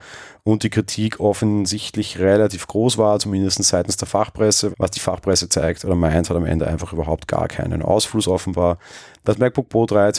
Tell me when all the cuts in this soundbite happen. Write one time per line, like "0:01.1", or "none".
0:04.7